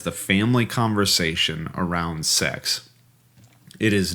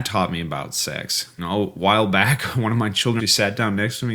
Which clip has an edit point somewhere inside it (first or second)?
second